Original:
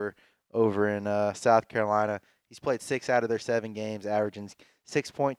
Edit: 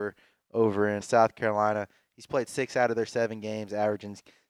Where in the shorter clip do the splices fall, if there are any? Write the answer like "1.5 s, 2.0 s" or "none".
1.0 s

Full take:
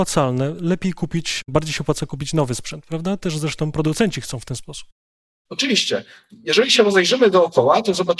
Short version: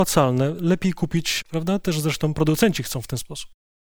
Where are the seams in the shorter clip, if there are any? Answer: 1.4 s

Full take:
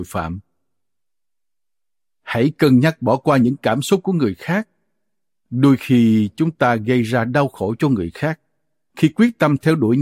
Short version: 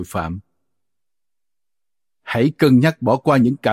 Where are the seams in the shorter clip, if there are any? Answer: none

